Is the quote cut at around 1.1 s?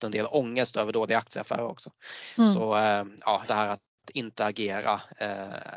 no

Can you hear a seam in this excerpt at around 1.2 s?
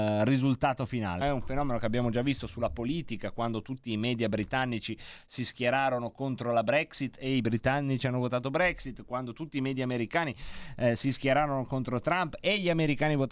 yes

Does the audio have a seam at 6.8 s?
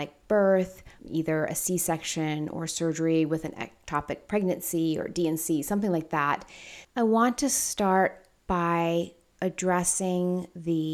yes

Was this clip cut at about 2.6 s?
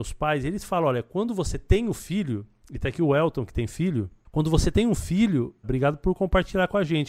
no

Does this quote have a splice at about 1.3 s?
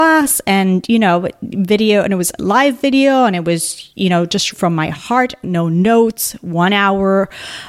no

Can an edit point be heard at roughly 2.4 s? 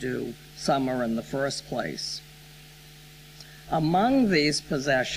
no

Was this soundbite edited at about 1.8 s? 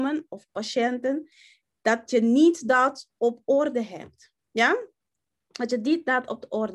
no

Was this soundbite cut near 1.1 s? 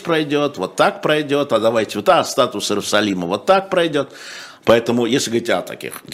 no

